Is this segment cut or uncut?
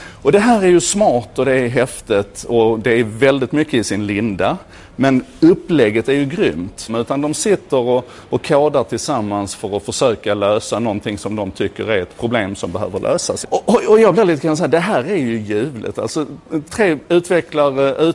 cut